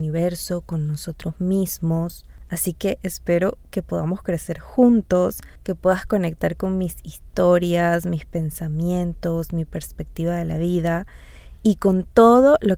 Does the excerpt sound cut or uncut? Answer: uncut